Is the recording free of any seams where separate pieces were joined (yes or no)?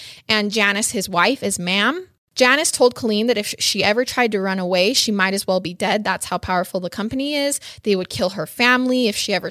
yes